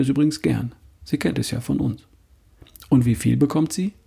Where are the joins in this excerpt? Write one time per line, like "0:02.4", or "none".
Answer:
none